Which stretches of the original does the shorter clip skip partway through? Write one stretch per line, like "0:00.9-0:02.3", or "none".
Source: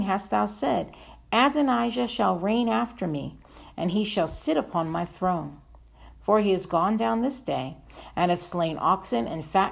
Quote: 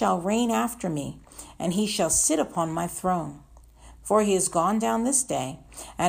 none